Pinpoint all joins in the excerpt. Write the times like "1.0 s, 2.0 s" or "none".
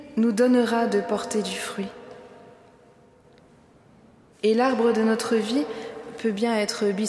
4.3 s